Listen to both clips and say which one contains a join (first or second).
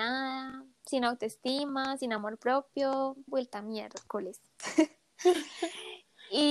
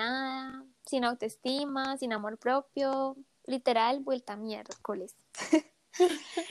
first